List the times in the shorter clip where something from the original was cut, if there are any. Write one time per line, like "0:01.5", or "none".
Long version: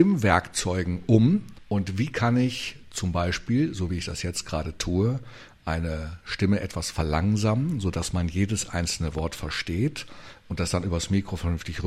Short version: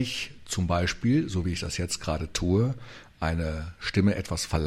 none